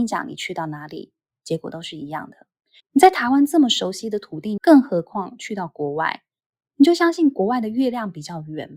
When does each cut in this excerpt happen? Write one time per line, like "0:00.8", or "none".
0:02.8
0:04.6